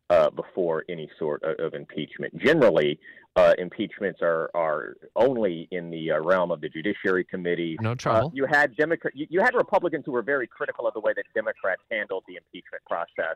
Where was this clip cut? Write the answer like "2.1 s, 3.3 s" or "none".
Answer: 7.8 s